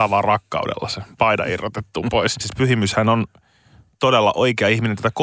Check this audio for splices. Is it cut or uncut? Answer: cut